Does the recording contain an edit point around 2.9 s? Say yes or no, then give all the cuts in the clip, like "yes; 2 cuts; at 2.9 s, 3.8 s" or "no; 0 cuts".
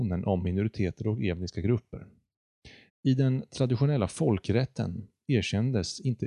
yes; 1 cut; at 2.9 s